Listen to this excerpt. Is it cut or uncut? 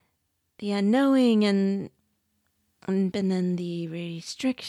cut